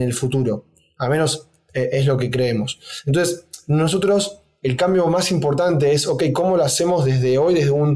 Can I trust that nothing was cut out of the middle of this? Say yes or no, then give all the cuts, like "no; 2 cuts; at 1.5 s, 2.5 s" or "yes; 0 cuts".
yes; 0 cuts